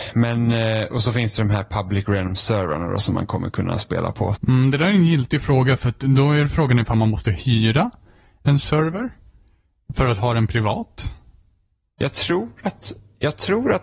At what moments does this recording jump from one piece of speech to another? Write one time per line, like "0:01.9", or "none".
0:04.3